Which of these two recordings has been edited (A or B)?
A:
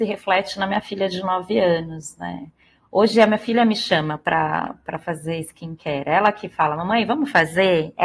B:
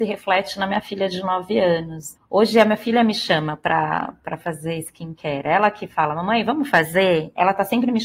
B